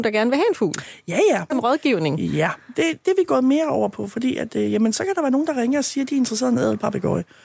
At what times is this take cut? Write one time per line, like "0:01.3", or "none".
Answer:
0:01.5